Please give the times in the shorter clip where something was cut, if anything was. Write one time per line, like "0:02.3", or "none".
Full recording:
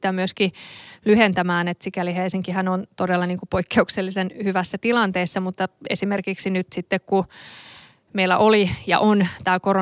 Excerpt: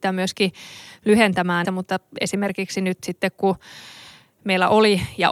0:01.6

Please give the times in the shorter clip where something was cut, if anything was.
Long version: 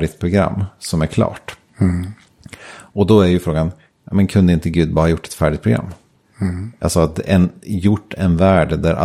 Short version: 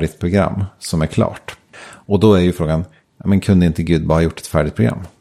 0:01.7

